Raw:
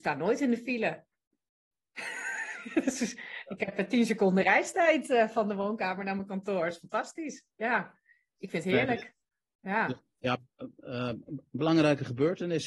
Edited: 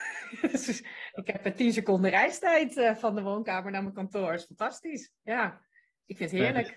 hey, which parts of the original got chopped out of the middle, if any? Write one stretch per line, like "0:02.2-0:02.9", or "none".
none